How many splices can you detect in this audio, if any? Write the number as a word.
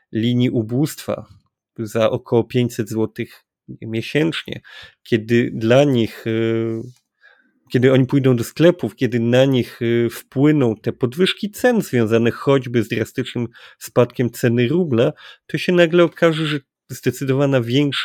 zero